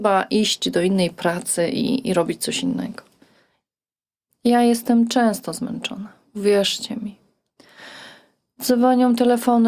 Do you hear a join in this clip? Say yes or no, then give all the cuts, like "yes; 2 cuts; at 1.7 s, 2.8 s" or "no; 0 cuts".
no; 0 cuts